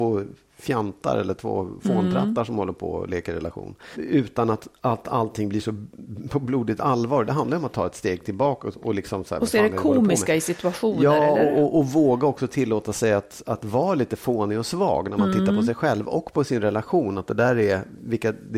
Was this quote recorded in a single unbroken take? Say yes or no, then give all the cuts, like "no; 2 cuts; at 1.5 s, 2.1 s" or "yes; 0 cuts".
no; 1 cut; at 3.9 s